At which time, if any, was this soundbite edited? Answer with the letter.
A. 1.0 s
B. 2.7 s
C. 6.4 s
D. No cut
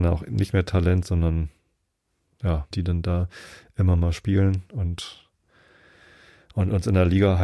B